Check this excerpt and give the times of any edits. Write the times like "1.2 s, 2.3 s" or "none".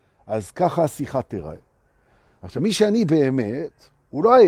none